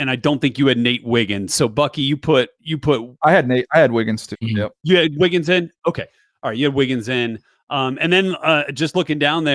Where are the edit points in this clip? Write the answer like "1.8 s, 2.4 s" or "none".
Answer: 4.3 s

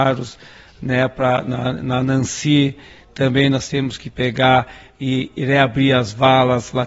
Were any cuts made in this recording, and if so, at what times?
none

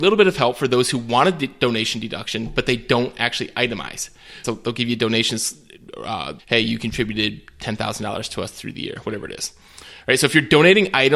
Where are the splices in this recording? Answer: 4.4 s, 6.4 s

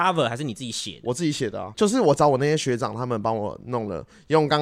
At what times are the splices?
1.7 s

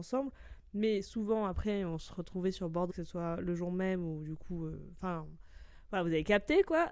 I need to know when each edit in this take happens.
2.9 s

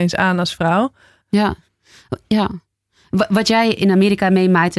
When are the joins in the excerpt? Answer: 1.2 s

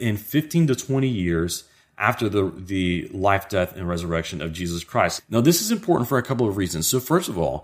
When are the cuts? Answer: 5.2 s

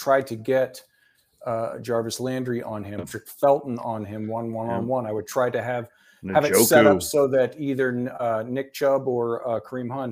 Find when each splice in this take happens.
3.0 s

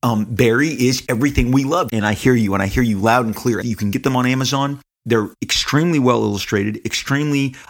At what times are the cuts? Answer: 1.9 s, 3.6 s

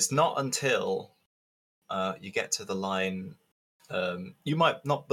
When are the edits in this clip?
none

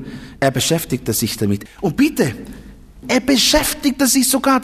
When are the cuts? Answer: 1.7 s, 3.0 s

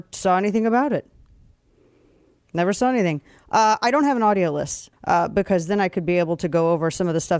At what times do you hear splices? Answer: 4.9 s

